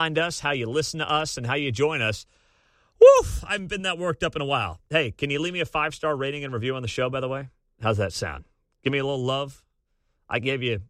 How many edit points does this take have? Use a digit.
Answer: 0